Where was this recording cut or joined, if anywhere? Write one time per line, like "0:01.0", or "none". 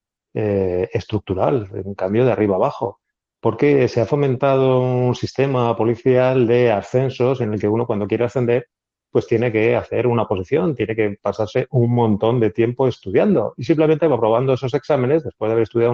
none